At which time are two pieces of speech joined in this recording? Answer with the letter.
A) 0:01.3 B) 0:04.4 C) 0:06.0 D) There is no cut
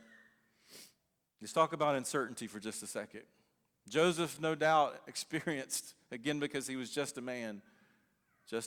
D